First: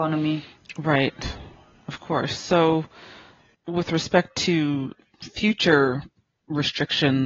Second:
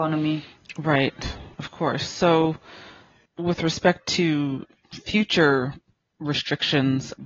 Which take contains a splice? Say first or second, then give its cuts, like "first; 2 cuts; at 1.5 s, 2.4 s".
second; 1 cut; at 1.5 s